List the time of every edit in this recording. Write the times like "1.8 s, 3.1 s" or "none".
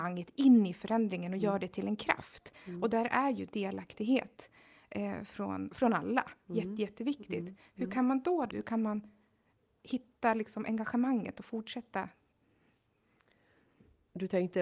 8.5 s